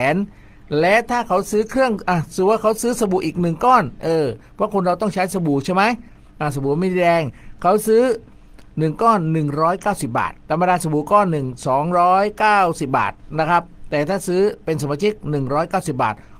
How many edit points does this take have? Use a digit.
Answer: 1